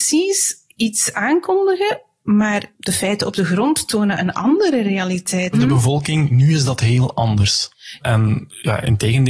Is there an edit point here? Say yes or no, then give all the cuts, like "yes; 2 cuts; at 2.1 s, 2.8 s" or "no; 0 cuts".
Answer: yes; 2 cuts; at 5.5 s, 8.0 s